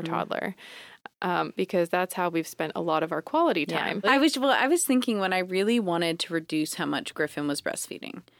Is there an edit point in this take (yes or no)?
yes